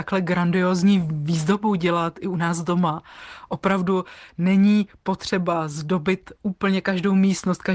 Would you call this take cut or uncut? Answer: uncut